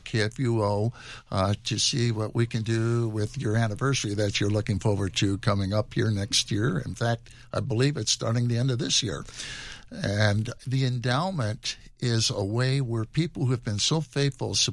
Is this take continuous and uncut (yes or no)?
yes